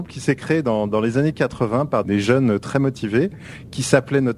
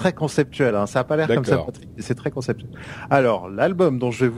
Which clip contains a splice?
first; 1 cut; at 2.0 s

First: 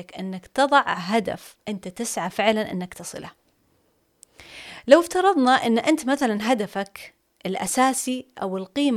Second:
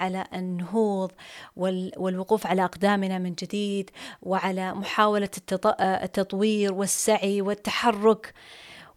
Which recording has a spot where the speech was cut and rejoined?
first; 1 cut; at 1.6 s

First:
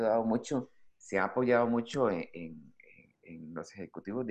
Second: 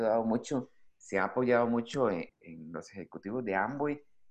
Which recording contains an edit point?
second; 1 cut; at 2.3 s

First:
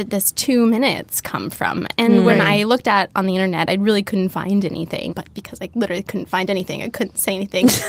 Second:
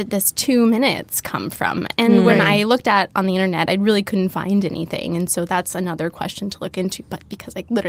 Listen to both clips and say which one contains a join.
first; 1 cut; at 5.1 s

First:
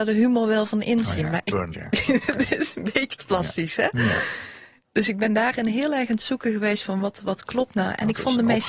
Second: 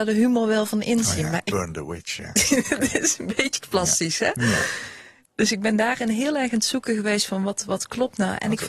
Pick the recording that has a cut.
first; 1 cut; at 1.7 s

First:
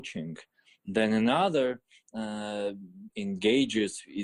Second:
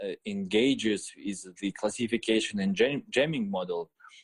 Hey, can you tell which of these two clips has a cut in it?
first; 1 cut; at 3.1 s

